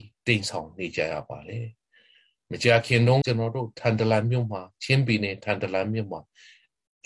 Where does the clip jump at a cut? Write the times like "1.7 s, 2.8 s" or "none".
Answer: 3.2 s